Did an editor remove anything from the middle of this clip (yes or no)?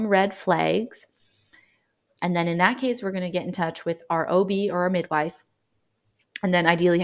yes